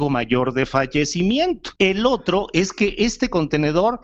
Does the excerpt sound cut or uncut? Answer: cut